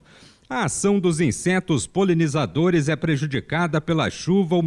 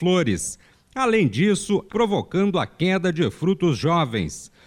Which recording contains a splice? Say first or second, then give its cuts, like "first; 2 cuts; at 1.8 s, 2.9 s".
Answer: second; 1 cut; at 1.9 s